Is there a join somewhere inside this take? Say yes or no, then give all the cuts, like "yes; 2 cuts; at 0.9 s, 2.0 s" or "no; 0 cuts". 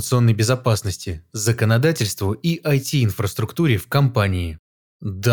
no; 0 cuts